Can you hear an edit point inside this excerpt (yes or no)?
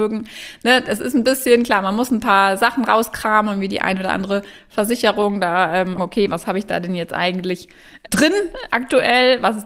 yes